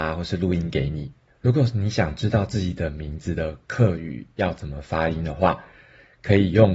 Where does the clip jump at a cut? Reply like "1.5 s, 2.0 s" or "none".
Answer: 1.3 s